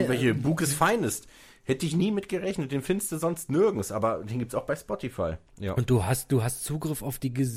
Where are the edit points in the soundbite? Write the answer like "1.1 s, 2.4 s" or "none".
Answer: 5.5 s